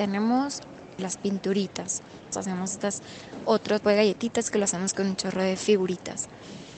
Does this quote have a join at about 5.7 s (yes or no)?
no